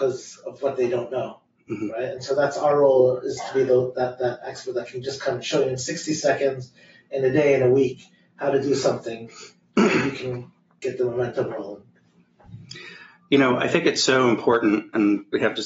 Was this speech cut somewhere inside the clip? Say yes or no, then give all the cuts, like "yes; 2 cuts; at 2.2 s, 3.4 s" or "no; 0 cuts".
no; 0 cuts